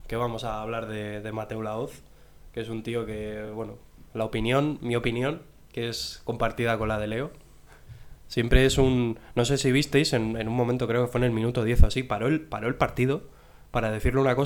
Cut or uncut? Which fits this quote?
uncut